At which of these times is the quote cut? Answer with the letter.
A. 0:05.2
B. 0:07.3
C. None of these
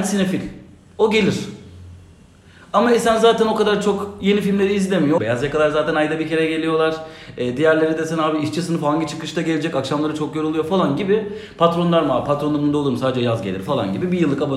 A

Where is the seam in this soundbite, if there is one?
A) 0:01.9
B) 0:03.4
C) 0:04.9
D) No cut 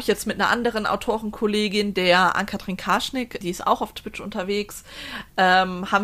B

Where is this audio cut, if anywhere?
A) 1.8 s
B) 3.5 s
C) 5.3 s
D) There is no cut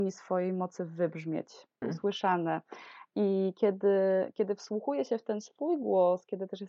A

